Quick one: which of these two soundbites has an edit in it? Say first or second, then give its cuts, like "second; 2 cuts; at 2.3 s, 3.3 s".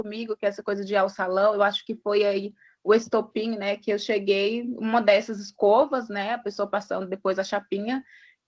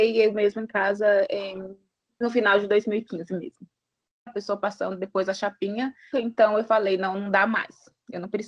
second; 2 cuts; at 4.3 s, 6.1 s